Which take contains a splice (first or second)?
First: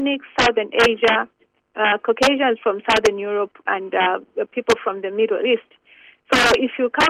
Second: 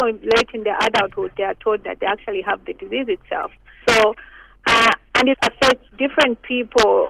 second